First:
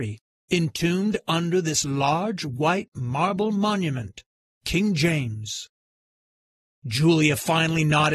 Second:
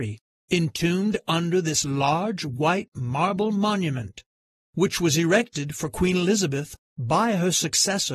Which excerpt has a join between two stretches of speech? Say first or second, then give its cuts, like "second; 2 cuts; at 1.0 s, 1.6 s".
first; 1 cut; at 4.5 s